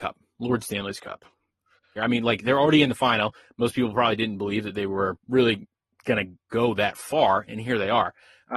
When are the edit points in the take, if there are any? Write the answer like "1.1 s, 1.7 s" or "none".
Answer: 2.0 s, 5.2 s